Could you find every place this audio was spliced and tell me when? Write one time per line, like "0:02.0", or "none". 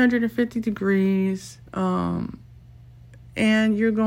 0:01.7